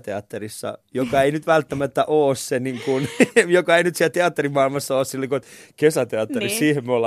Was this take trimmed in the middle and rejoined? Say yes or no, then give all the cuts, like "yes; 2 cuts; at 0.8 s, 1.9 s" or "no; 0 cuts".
no; 0 cuts